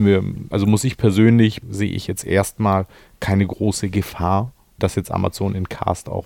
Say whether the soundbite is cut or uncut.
cut